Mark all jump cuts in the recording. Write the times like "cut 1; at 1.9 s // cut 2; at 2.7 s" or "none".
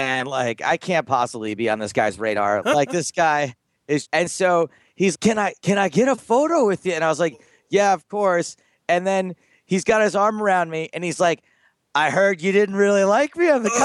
cut 1; at 2.6 s // cut 2; at 4.0 s // cut 3; at 5.1 s